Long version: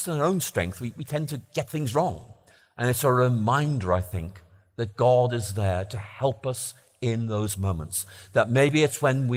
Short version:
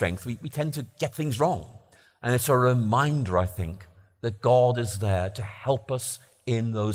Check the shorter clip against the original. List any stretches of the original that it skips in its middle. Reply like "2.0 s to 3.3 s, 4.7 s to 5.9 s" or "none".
none